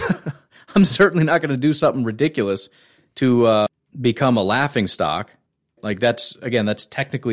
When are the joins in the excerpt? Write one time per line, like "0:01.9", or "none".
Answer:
0:05.8